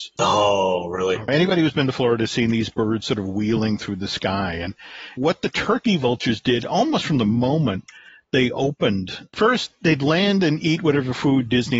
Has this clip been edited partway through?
no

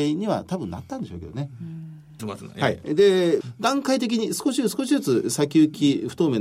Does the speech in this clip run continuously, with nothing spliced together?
no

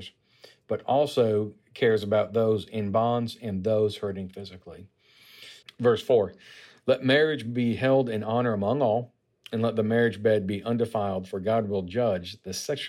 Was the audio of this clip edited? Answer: yes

